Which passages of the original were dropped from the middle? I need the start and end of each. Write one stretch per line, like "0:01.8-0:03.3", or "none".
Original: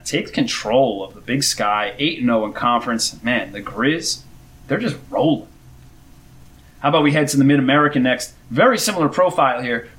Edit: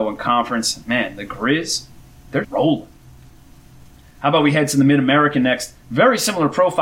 0:04.8-0:05.0